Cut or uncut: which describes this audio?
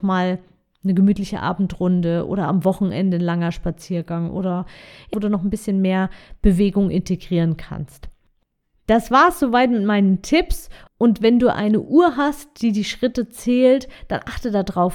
cut